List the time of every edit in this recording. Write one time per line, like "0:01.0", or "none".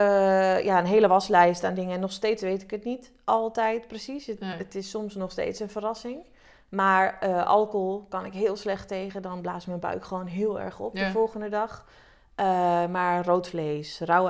none